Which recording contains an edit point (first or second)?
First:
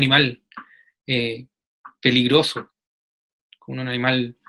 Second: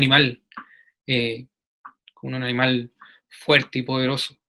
second